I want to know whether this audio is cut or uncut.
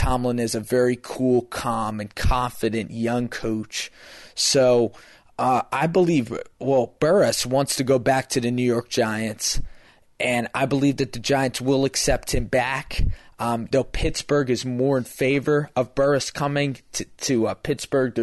cut